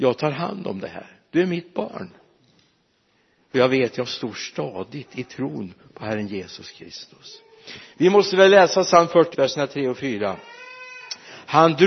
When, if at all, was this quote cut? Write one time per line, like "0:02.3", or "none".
0:09.3